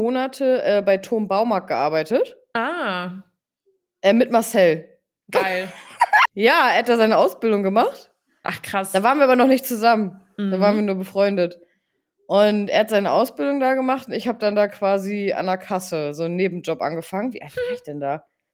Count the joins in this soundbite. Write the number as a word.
one